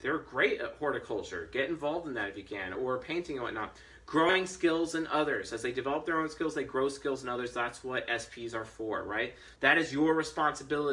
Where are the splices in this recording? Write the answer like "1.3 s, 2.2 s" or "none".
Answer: 2.7 s, 9.6 s